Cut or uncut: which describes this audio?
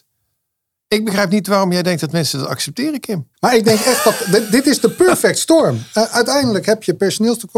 cut